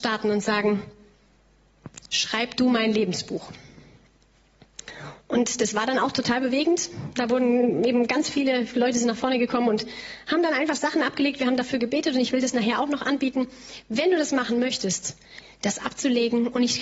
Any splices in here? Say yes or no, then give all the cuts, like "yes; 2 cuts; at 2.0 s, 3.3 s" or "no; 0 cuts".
yes; 1 cut; at 15.4 s